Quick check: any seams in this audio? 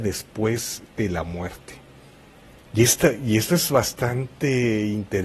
no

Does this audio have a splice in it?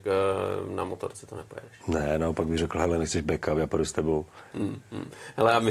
yes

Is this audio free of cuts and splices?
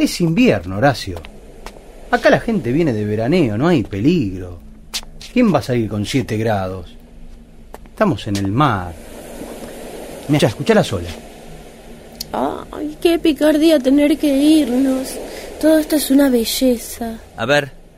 no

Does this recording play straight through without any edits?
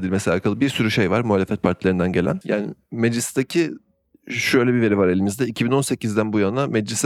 no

